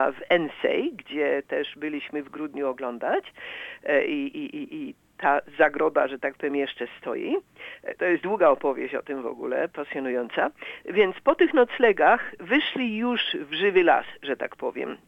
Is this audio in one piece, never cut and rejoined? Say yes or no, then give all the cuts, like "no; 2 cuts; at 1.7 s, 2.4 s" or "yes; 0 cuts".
yes; 0 cuts